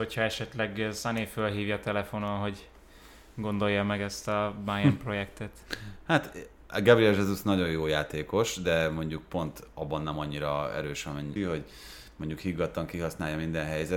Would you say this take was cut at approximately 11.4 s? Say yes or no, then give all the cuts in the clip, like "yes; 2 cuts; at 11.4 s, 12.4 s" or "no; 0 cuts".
yes; 1 cut; at 11.4 s